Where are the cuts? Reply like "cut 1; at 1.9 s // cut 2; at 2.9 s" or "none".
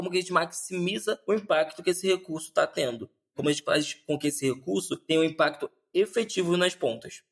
none